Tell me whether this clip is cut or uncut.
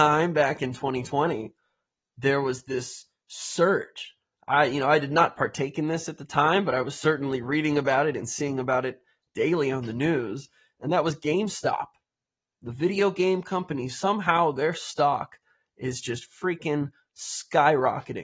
uncut